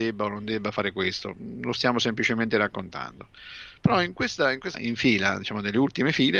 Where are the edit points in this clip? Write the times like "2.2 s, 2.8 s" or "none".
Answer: 4.7 s